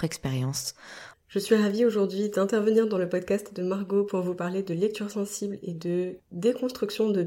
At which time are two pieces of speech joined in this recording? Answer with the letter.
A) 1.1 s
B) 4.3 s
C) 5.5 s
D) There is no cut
A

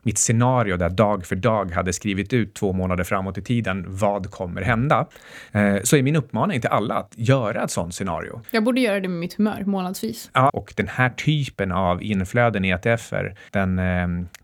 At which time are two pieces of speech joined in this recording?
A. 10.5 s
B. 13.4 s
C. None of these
A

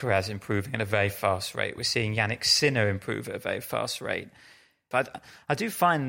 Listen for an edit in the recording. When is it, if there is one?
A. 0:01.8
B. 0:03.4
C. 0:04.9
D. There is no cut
C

